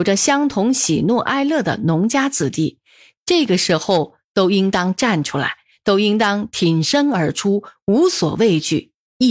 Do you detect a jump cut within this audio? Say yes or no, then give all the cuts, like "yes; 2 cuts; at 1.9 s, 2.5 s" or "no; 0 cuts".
no; 0 cuts